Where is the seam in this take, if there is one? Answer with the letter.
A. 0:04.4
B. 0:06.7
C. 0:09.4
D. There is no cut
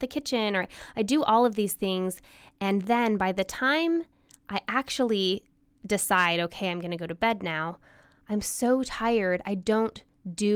D